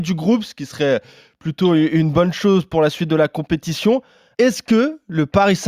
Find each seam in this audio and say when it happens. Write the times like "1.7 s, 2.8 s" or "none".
4.3 s